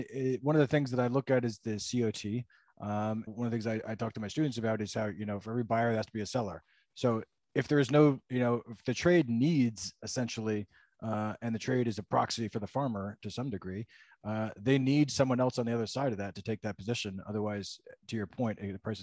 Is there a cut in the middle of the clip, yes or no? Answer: yes